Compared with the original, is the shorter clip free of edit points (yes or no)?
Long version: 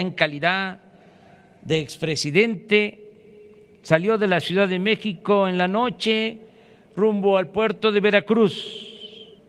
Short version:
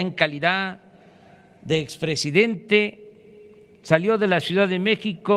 yes